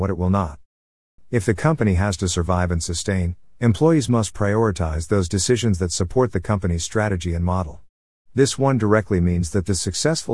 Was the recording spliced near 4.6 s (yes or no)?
no